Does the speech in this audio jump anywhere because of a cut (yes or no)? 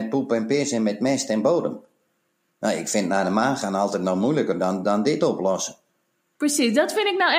yes